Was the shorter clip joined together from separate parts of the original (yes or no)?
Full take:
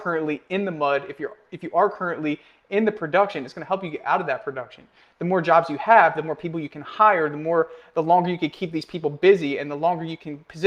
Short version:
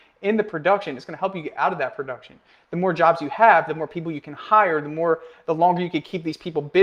no